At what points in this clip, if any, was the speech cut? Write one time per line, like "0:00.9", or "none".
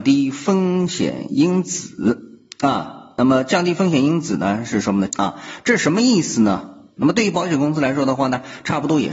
0:05.1
0:07.0